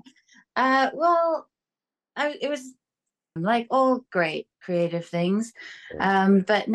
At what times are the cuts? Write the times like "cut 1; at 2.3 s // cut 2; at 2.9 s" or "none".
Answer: cut 1; at 3.4 s // cut 2; at 4.5 s